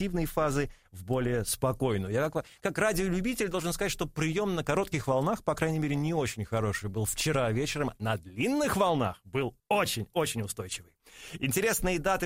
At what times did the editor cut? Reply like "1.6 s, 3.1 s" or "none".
9.6 s